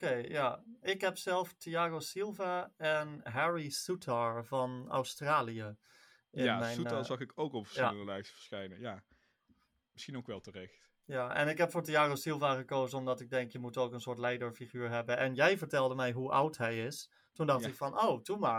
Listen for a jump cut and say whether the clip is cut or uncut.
uncut